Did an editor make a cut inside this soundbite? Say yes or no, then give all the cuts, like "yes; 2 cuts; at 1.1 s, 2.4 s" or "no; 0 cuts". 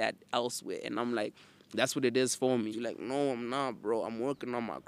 yes; 1 cut; at 2.7 s